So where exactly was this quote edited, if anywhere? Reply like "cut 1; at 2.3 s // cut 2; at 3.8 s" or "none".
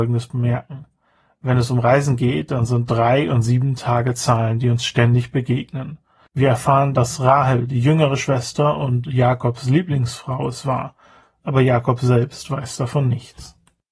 cut 1; at 6.3 s